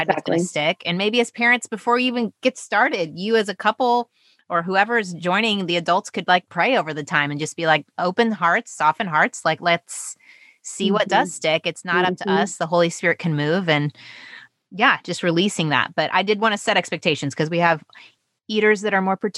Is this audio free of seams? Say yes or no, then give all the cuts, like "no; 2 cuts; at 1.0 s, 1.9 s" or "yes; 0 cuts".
yes; 0 cuts